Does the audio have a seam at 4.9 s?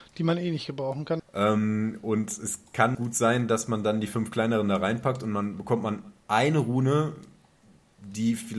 no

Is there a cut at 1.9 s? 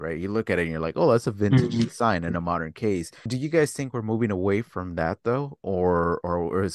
no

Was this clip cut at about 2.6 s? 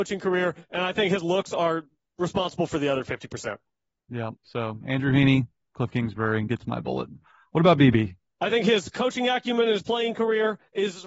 no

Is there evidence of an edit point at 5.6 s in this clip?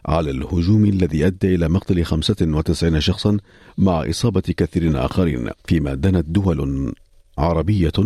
yes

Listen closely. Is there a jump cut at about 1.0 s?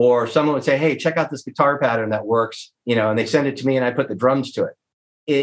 no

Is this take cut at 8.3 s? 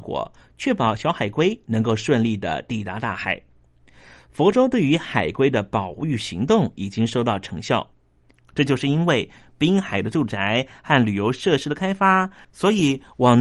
yes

